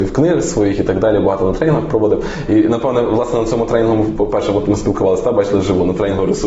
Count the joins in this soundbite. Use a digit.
0